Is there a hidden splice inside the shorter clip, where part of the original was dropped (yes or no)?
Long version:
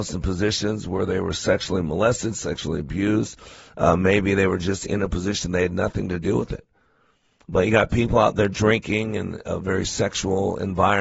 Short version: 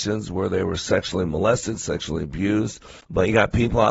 yes